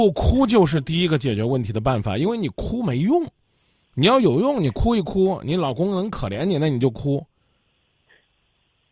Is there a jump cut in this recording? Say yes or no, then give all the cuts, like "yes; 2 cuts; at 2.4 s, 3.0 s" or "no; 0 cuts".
no; 0 cuts